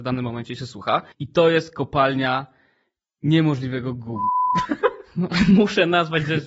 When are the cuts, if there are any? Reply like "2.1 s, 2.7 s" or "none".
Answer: 1.1 s